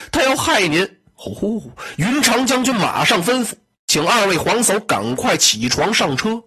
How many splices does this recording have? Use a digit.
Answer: 0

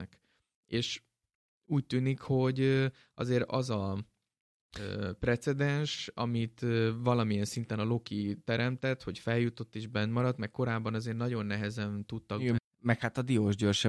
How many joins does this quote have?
1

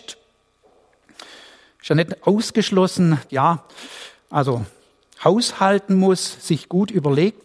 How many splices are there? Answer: 1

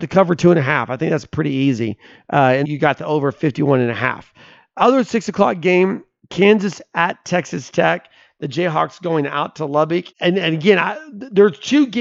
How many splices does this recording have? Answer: 2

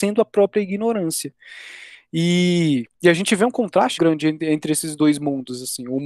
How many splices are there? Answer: 2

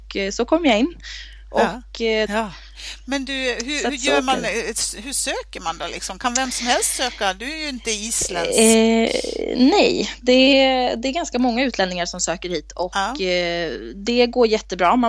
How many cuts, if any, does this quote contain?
1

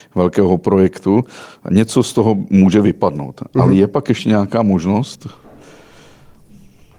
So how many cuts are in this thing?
0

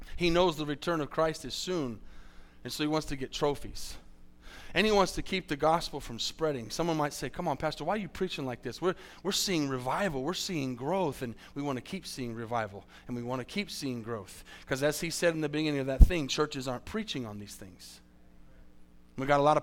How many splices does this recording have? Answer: 0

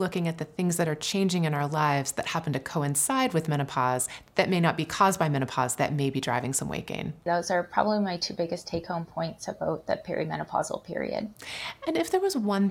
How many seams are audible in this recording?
1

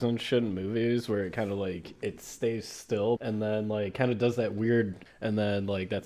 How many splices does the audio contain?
2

